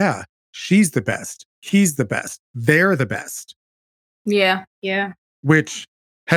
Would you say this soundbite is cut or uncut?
cut